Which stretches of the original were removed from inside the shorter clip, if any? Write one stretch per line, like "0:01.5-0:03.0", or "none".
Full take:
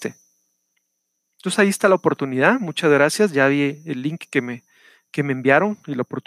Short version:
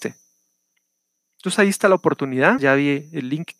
0:02.6-0:03.3